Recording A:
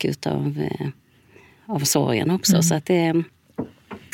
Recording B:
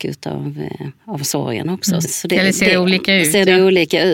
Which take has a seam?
B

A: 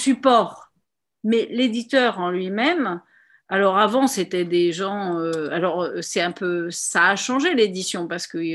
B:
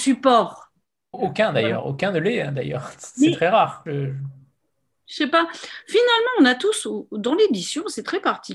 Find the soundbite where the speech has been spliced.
B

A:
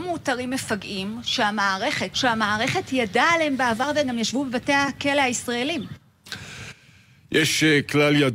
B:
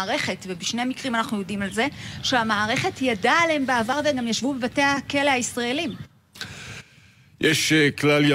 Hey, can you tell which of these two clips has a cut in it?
A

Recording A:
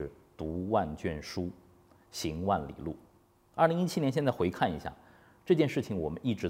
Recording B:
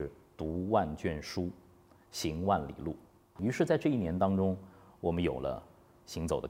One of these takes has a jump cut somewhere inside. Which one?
B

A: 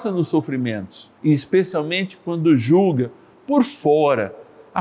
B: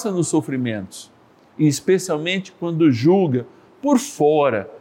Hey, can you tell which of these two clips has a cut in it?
A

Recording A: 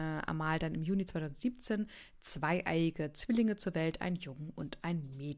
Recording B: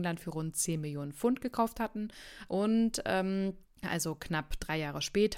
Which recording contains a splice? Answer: B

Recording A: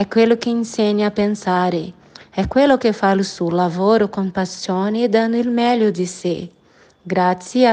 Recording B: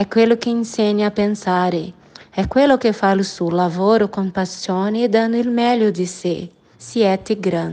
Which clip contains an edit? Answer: B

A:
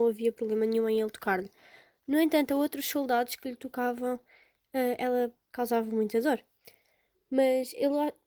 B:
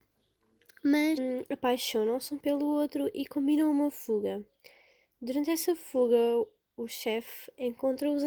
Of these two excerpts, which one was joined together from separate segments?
A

